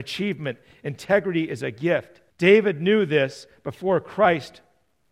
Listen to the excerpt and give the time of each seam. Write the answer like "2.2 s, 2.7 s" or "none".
2.3 s